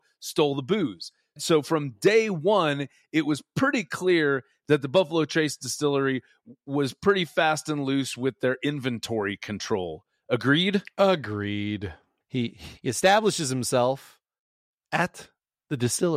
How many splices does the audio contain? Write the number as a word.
zero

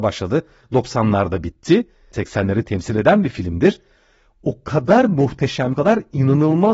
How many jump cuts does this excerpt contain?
zero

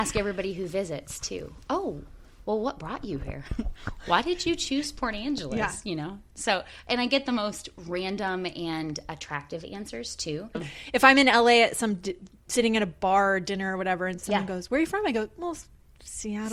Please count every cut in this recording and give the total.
one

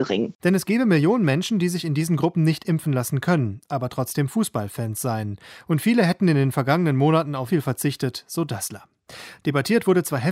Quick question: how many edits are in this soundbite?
one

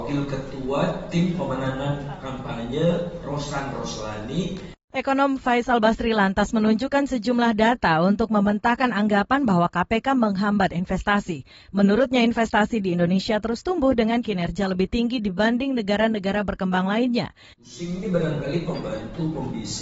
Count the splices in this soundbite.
one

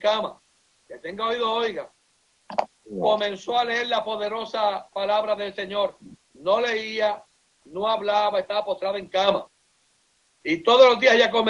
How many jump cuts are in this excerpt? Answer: one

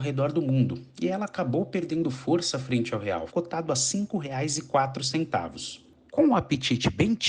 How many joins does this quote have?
two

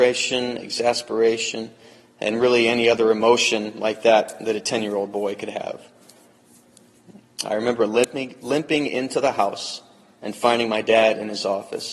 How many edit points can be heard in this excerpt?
zero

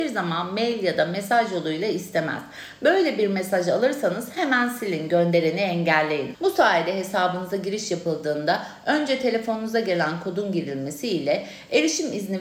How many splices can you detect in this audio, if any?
one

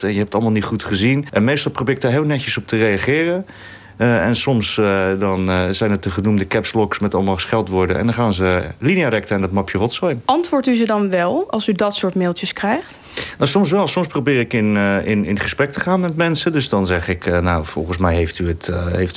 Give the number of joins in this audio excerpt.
zero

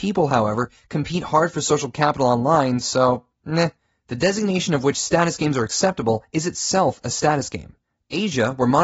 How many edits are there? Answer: zero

